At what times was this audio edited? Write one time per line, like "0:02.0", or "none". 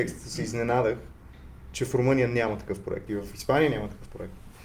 0:03.1

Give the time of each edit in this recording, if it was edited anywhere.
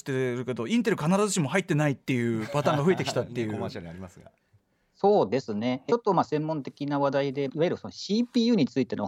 0:05.9
0:07.5

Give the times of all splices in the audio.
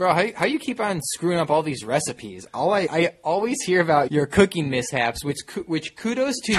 0:02.9
0:04.1

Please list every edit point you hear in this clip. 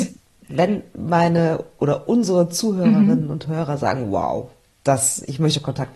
none

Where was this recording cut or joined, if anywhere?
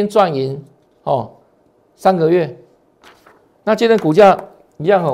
none

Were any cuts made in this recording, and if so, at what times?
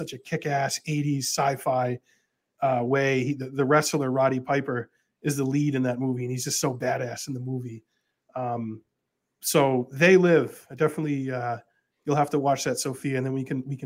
none

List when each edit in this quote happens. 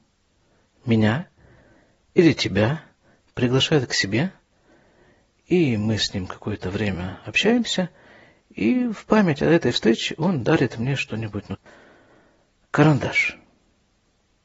0:11.5

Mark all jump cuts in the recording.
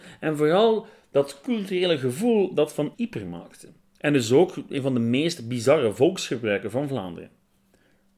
0:02.9

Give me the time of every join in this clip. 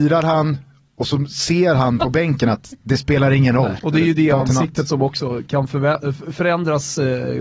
0:03.8

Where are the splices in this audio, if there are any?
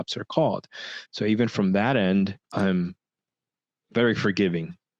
0:01.1
0:02.4

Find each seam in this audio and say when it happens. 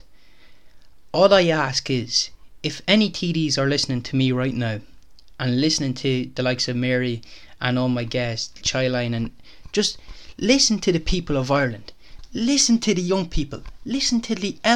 0:08.6
0:12.3

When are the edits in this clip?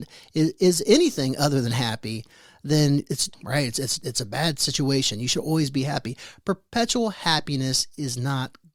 0:03.3

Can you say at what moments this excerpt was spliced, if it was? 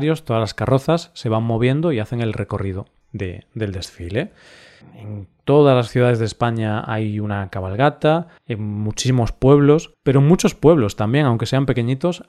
0:04.8
0:08.4
0:09.9

